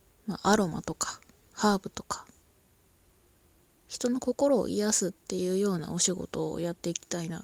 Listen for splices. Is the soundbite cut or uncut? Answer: uncut